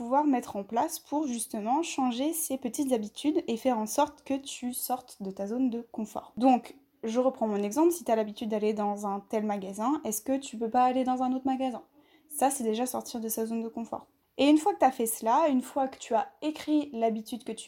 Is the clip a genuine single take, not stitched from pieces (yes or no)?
yes